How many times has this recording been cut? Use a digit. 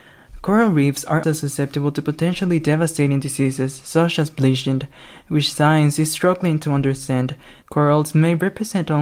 2